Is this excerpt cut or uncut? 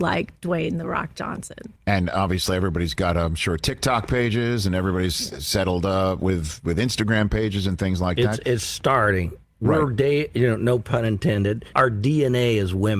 cut